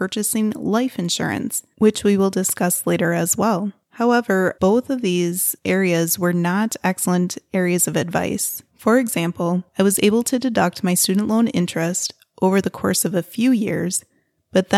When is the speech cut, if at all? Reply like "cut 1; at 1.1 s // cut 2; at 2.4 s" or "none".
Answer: cut 1; at 4.5 s